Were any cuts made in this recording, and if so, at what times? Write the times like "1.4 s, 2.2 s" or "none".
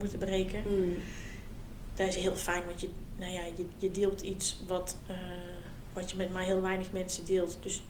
none